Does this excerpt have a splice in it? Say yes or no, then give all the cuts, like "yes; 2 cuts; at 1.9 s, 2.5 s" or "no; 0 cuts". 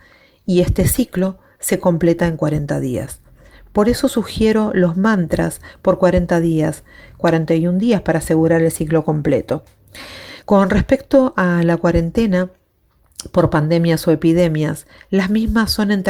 no; 0 cuts